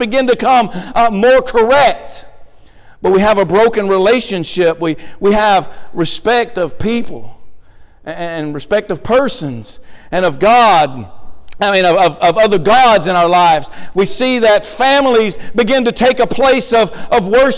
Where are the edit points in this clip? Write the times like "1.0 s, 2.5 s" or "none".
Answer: none